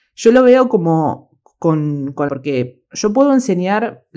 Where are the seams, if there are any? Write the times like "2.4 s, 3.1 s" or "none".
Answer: 2.3 s